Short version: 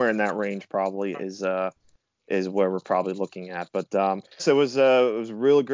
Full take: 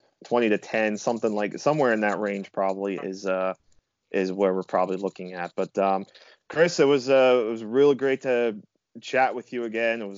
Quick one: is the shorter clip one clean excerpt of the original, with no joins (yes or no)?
no